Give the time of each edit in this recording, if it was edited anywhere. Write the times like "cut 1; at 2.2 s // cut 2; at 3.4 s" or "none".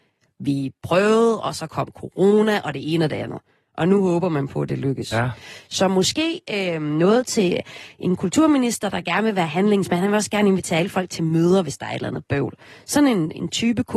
none